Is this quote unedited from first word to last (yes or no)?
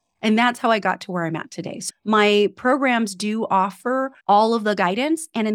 no